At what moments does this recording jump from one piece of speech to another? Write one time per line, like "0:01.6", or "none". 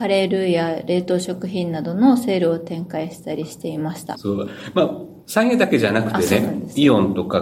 0:04.1